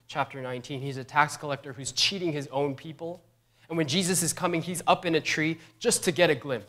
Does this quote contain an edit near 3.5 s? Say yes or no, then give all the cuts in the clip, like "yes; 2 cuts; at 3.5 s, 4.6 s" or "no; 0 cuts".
no; 0 cuts